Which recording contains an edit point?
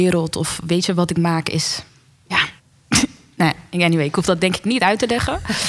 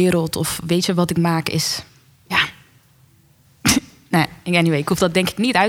first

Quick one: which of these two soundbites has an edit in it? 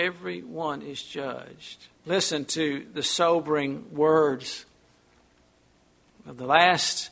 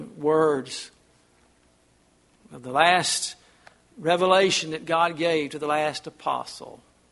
first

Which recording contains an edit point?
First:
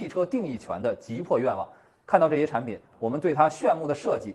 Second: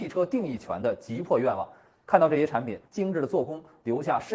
second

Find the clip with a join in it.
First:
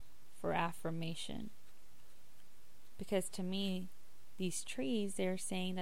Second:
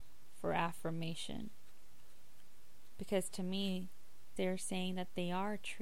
second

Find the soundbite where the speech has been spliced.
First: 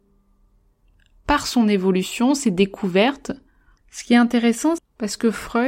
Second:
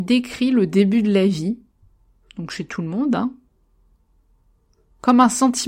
first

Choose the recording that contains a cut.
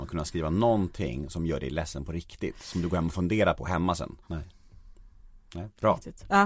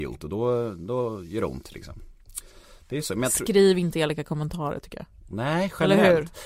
first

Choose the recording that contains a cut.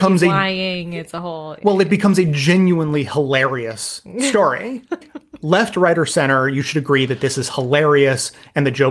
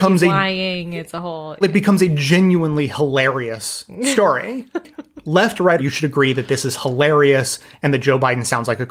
second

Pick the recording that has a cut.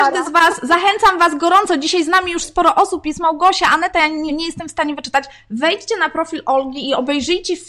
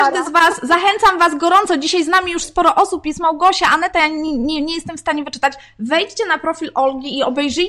first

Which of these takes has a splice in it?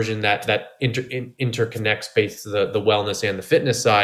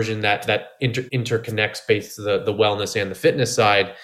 second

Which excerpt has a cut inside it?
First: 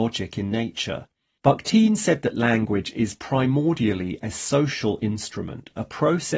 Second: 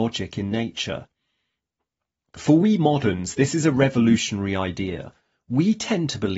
first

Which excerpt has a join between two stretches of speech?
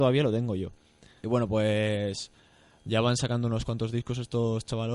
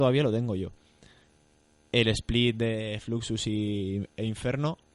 first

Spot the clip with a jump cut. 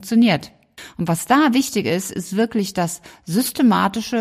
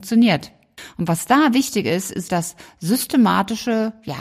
second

